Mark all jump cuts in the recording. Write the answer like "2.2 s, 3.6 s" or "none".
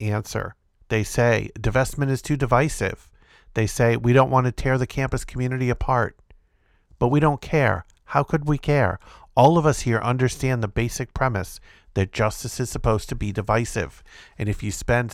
none